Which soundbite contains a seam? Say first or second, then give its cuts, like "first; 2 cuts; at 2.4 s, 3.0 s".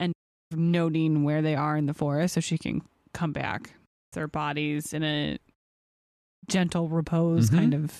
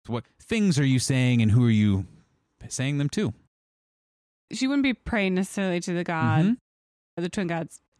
first; 1 cut; at 4.1 s